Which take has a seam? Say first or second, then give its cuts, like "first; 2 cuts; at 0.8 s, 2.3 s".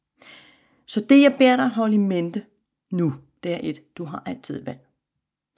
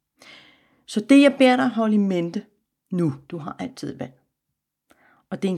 second; 1 cut; at 3.3 s